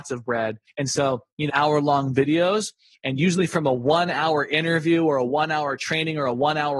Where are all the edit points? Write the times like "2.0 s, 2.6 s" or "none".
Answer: 1.5 s